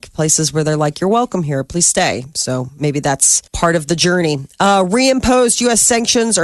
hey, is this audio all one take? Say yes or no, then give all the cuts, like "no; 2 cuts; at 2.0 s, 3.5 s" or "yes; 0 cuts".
no; 1 cut; at 3.5 s